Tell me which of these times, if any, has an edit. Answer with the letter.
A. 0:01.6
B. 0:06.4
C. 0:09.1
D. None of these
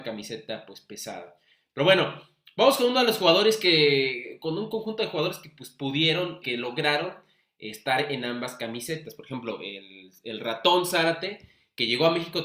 B